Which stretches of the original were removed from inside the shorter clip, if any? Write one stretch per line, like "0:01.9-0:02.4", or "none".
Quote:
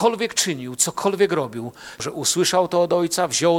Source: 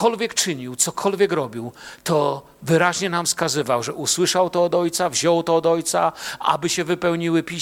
0:02.0-0:03.8